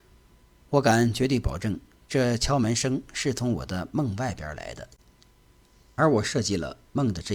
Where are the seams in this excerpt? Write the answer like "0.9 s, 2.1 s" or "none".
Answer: none